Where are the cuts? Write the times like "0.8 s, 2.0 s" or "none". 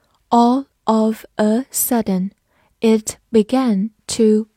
none